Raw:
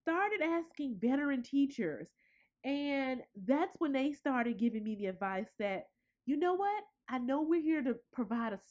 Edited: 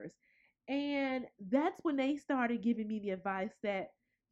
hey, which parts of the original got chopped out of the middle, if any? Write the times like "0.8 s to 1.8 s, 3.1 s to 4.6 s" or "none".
none